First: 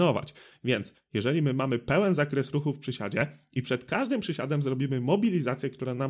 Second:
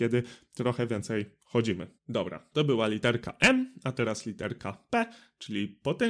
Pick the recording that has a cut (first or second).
second